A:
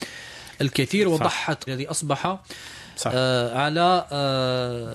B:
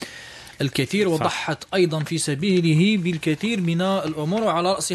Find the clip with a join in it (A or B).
A